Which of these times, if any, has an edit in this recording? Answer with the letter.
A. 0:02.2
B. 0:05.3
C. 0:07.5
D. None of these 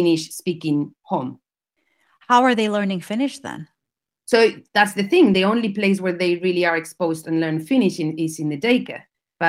D